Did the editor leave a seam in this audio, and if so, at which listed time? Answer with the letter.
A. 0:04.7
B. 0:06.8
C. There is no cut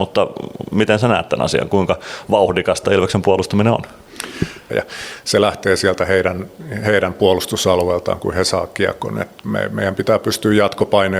A